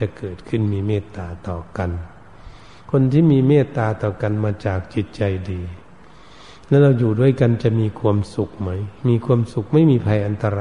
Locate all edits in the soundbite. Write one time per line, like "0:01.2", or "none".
none